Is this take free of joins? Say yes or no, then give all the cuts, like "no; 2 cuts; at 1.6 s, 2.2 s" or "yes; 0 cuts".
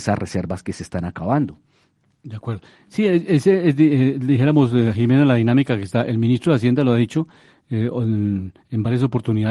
yes; 0 cuts